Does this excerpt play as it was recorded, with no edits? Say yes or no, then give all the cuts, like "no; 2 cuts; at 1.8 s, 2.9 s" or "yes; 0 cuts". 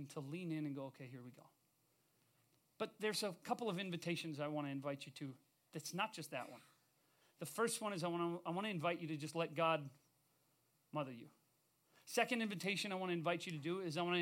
yes; 0 cuts